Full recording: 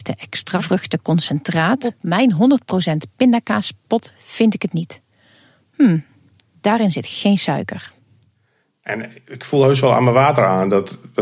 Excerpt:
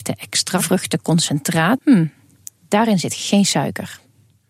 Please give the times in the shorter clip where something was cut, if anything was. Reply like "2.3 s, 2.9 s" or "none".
1.8 s

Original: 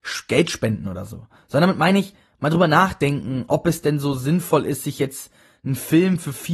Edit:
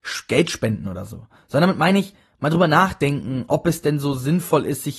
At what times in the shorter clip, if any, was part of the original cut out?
none

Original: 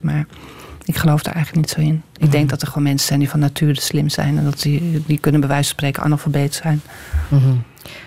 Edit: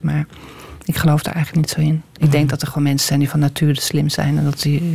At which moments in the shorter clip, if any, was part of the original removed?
none

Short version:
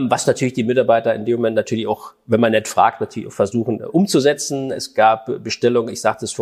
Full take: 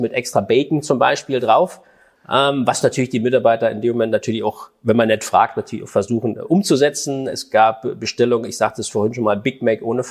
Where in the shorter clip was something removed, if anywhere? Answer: none

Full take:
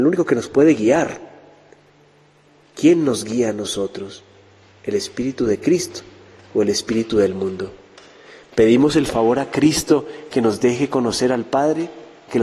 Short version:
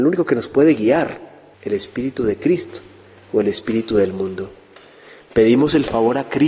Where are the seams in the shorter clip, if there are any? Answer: 1.5 s

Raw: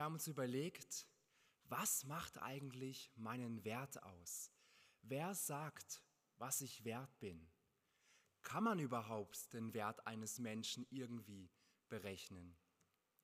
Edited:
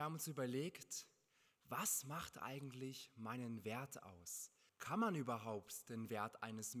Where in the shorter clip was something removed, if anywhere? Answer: 4.7 s

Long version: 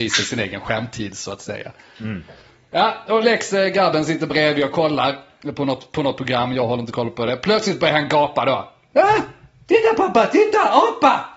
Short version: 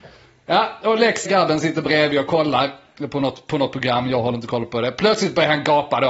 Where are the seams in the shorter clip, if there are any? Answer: 1.3 s

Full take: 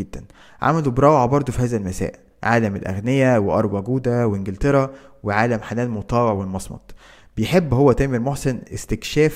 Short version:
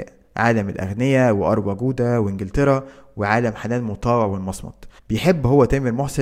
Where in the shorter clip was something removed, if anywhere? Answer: 5.0 s

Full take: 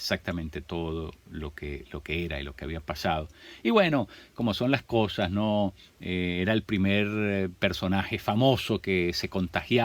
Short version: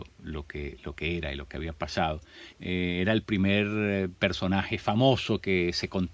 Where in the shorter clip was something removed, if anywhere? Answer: 2.5 s

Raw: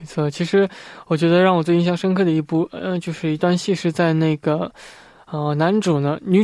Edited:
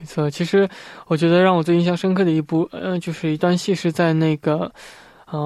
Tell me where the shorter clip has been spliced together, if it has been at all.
none

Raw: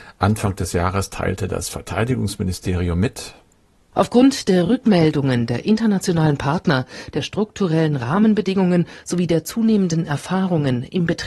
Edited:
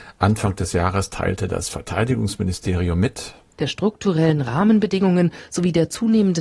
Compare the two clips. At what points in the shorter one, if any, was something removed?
3.6 s

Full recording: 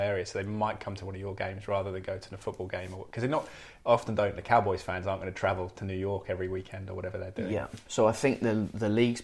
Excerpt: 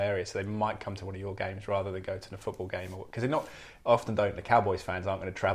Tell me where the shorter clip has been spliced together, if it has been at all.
none

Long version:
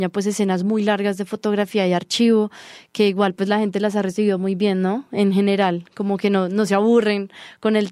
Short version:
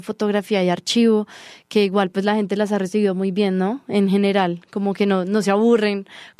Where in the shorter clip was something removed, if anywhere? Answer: none

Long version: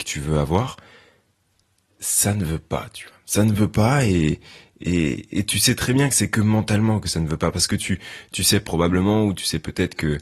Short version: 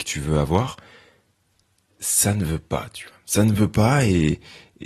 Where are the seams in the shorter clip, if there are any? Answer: none

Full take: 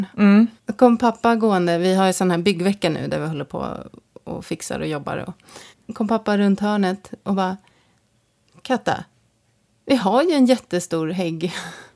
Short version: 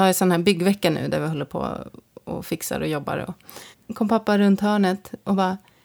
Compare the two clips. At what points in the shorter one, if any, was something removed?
none

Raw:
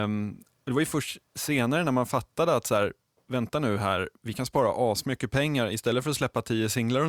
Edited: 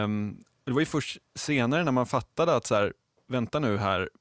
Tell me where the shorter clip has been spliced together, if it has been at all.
none

